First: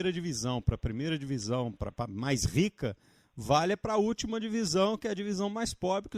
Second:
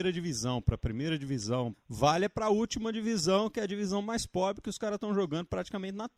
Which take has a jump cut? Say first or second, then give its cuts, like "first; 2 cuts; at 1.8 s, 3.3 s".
second; 1 cut; at 1.7 s